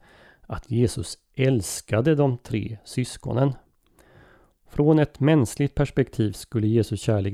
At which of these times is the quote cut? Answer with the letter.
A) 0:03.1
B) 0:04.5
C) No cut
B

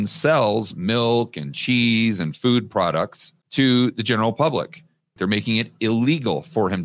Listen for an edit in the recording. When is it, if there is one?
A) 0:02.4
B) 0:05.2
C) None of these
B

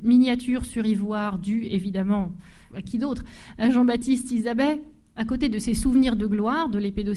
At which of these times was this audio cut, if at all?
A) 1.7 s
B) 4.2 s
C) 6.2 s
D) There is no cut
D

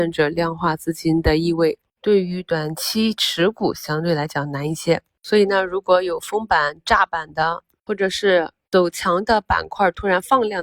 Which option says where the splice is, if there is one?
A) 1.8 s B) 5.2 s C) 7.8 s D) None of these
D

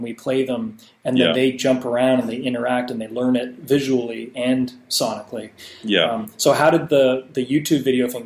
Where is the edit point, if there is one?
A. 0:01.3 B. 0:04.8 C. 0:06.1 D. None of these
D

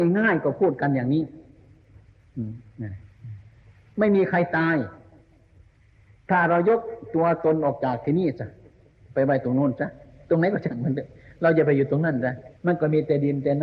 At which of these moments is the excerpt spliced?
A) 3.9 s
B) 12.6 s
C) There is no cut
B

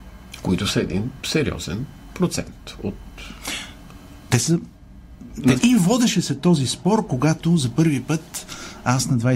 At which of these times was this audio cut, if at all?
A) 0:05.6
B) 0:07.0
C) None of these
A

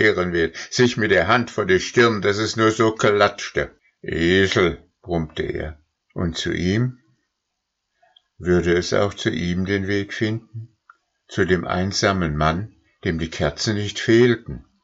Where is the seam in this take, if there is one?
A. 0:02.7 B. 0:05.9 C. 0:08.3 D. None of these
B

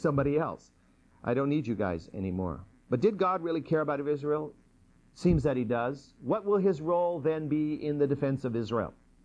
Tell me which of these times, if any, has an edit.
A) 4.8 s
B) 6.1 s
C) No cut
C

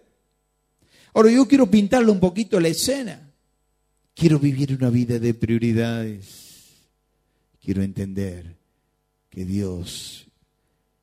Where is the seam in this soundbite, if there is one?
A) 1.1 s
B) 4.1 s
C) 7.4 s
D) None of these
B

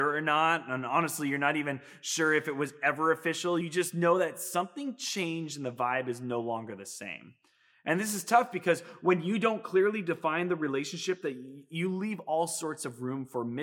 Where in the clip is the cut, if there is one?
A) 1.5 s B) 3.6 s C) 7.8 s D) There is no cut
D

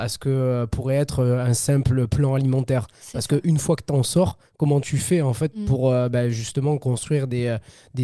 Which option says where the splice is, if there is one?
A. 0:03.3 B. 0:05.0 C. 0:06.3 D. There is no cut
D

